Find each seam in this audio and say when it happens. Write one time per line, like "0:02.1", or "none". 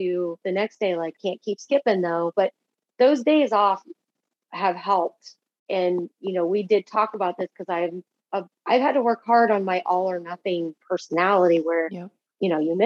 0:01.2
0:08.6